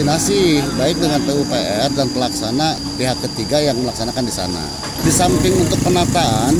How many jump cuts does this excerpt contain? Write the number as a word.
one